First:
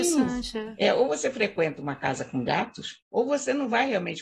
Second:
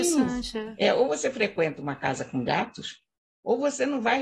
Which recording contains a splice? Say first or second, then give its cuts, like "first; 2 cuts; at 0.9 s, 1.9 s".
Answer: first; 1 cut; at 3.0 s